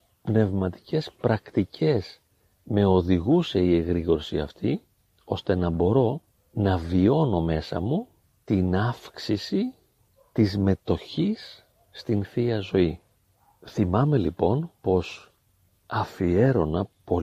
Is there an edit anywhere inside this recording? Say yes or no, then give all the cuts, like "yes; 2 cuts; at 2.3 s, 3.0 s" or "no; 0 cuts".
no; 0 cuts